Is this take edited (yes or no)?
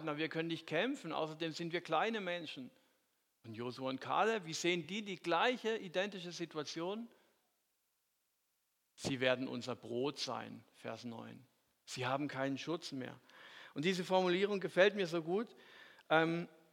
no